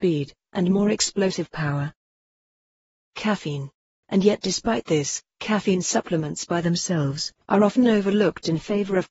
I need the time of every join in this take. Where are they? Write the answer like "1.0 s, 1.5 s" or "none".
4.0 s, 7.4 s

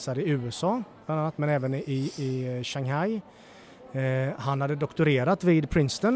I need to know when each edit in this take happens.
none

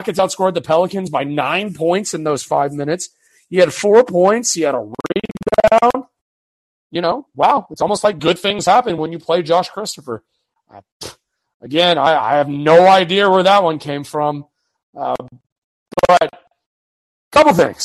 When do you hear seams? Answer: none

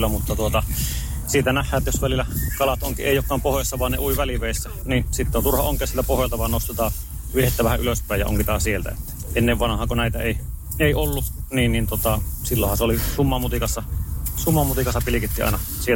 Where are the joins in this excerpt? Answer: 4.8 s

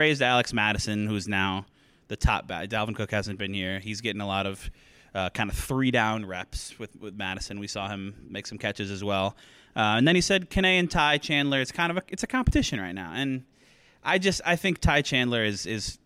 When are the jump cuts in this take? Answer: none

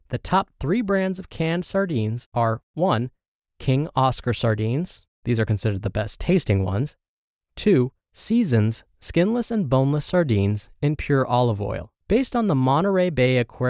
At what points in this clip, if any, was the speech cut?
8.0 s, 12.0 s

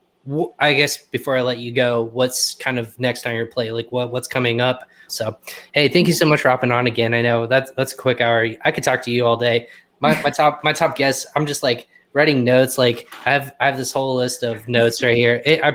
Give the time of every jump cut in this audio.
5.1 s

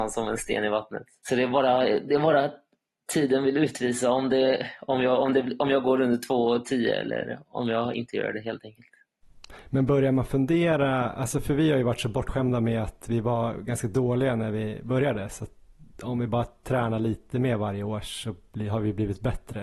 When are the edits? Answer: 1.2 s

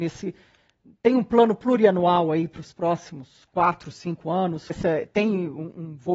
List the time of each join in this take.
4.7 s

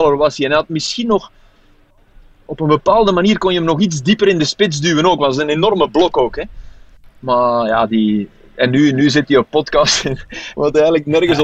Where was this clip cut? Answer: 10.5 s

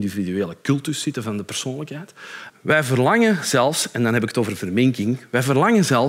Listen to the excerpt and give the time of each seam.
2.5 s

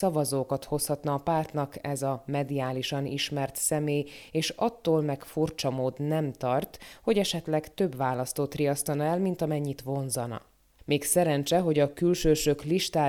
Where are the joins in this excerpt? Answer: none

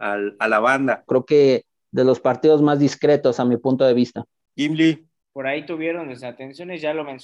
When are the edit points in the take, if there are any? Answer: 1.1 s, 5.3 s

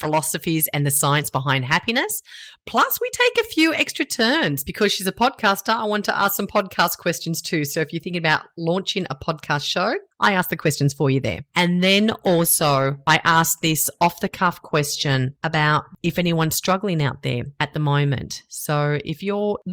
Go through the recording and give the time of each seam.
none

